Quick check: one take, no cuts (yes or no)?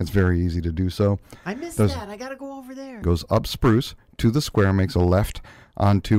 no